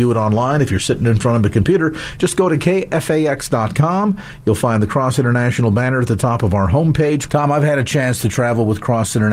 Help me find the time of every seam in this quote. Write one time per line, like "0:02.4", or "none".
0:07.3